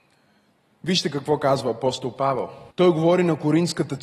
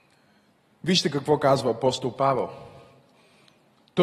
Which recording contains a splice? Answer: first; 1 cut; at 2.7 s

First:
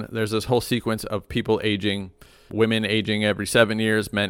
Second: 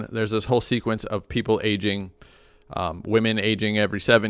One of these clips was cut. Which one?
first; 1 cut; at 2.5 s

